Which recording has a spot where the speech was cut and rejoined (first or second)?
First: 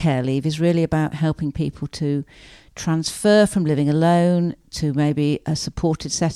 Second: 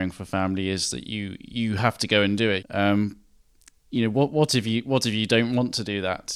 second